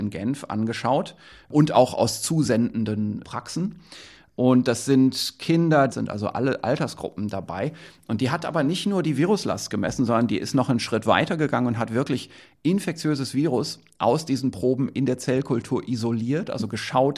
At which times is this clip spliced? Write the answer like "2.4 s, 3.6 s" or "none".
5.9 s